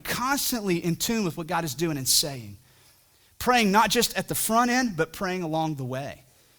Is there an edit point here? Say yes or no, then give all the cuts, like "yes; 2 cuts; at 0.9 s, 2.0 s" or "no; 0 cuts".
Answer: no; 0 cuts